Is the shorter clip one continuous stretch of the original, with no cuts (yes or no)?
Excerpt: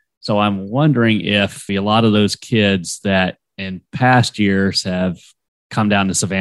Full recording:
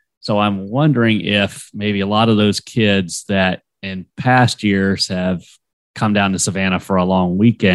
no